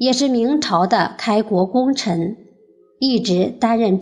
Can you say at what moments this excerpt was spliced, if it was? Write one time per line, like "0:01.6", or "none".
none